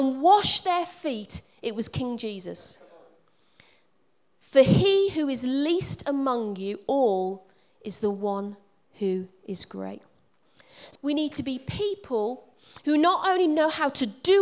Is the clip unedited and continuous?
no; 2 cuts; at 4.3 s, 11.0 s

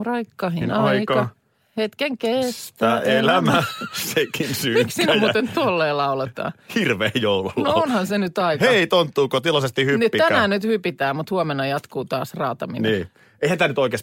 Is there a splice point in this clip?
no; 0 cuts

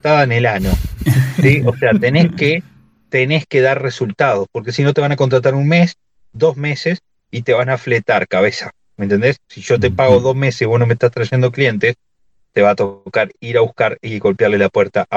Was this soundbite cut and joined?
yes; 1 cut; at 9.4 s

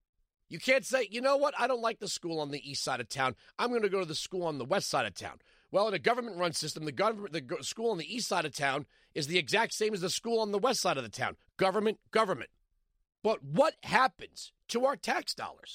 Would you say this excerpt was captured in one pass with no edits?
yes; 0 cuts

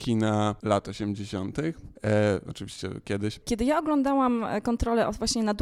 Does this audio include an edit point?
yes; 2 cuts; at 2.0 s, 3.4 s

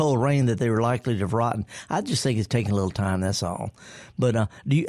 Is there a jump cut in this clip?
no; 0 cuts

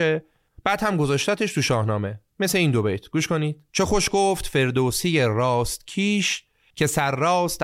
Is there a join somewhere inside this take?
yes; 2 cuts; at 2.3 s, 3.7 s

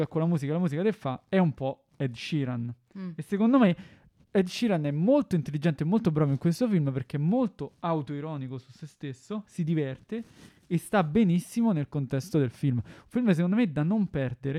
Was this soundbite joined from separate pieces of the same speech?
no; 0 cuts

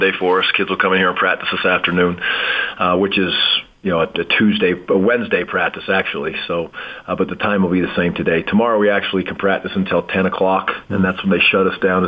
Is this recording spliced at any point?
no; 0 cuts

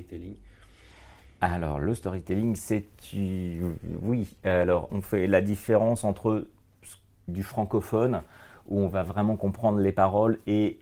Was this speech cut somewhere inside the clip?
yes; 2 cuts; at 4.9 s, 7.3 s

